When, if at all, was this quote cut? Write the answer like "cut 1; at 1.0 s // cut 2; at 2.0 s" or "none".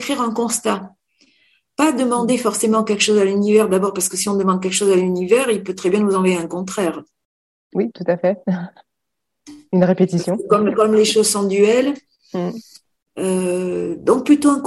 none